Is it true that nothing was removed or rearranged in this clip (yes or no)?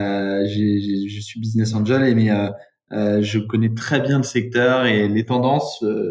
yes